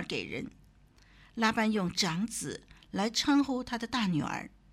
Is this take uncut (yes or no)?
yes